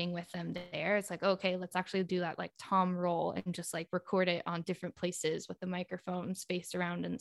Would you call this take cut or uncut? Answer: uncut